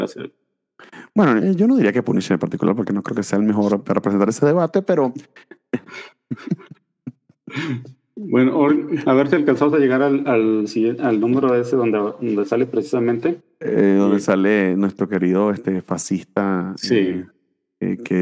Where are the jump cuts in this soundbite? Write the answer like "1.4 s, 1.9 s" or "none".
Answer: none